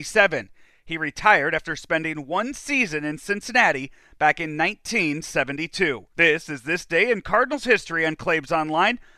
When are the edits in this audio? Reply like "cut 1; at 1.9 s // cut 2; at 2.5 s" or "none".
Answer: cut 1; at 6.1 s